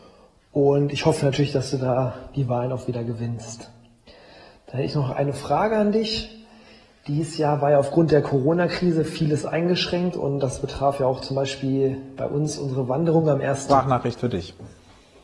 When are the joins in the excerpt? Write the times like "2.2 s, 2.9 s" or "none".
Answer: 13.7 s